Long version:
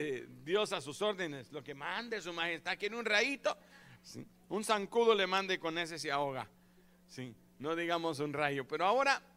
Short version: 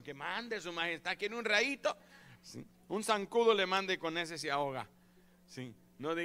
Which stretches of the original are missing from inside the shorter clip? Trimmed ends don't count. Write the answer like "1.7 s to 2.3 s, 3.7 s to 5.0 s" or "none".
none